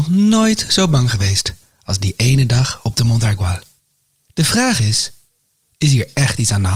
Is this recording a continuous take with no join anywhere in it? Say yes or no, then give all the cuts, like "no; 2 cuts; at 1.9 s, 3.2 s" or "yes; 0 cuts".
yes; 0 cuts